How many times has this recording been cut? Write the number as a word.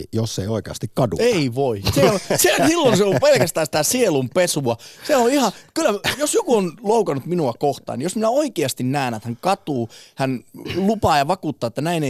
one